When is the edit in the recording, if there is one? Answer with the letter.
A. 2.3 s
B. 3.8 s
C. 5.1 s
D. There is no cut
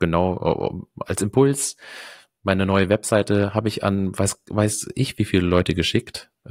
D